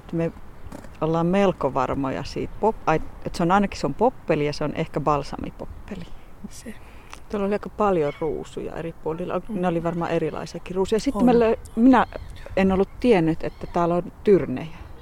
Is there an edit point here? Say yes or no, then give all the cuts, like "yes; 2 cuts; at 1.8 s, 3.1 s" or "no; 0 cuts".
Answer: yes; 2 cuts; at 2.5 s, 6.5 s